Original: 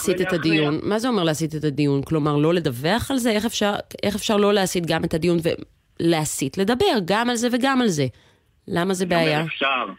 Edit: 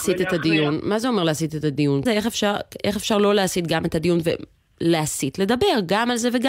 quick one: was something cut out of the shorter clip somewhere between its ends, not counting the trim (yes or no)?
yes